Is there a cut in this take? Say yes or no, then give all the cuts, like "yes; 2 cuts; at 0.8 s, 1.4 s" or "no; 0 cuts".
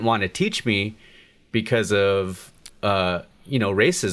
no; 0 cuts